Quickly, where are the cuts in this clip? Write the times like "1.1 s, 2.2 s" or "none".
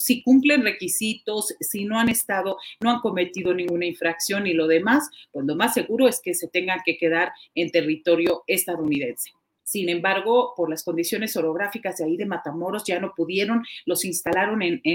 9.6 s